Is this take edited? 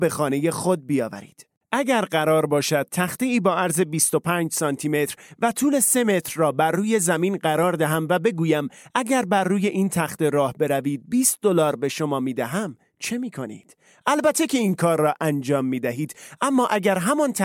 no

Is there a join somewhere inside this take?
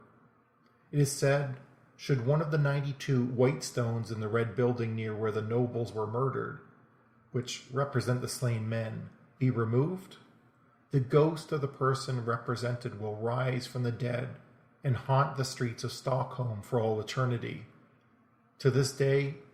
no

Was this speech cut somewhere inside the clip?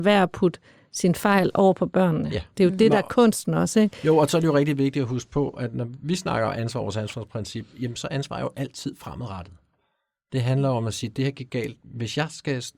no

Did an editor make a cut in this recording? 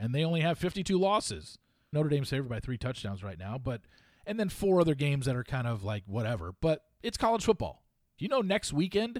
yes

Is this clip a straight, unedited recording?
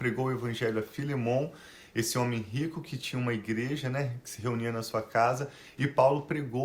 yes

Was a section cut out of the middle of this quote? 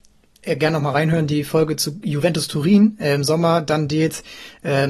no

